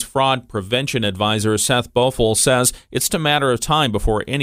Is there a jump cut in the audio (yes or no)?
yes